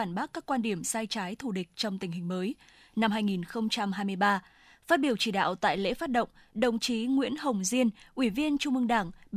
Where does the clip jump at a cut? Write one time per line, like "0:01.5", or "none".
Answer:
none

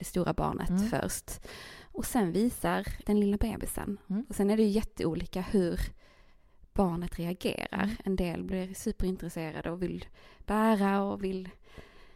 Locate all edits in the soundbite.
0:03.0

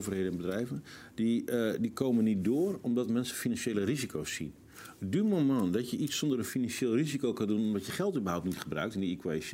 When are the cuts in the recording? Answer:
none

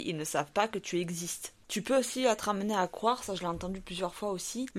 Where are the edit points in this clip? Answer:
0:01.6

